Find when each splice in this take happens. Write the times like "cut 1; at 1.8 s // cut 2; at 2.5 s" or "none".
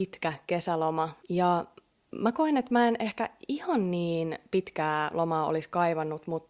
cut 1; at 1.2 s